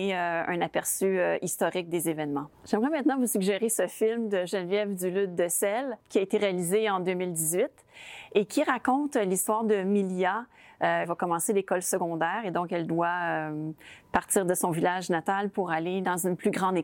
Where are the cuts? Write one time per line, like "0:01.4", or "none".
0:06.0
0:11.0

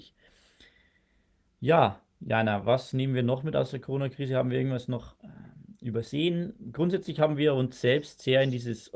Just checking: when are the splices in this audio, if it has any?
none

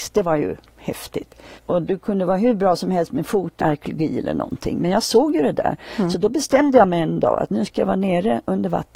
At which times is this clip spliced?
0:01.5
0:03.6

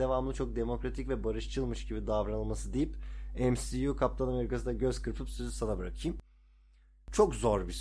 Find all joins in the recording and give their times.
none

